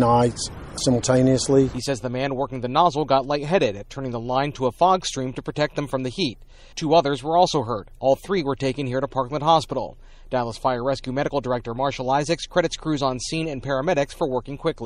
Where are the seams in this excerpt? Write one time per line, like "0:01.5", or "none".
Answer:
none